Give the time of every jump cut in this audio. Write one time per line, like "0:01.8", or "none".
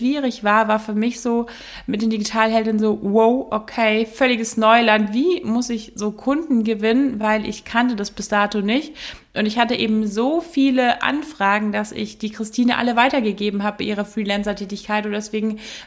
none